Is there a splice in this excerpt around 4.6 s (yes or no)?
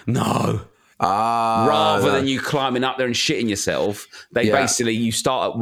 no